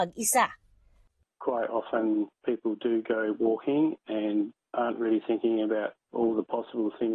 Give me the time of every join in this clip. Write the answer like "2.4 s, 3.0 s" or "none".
none